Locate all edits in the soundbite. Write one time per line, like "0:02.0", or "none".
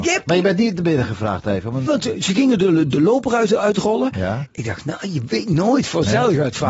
0:01.9